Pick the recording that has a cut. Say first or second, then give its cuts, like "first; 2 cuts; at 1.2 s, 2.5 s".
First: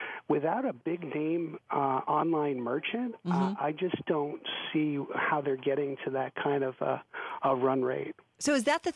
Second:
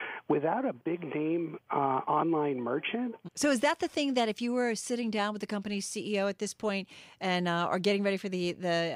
second; 1 cut; at 3.2 s